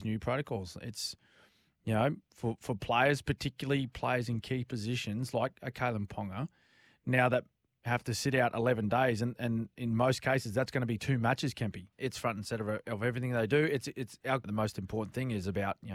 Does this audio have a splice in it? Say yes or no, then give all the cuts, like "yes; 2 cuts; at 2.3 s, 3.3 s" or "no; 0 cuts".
yes; 2 cuts; at 11.9 s, 14.4 s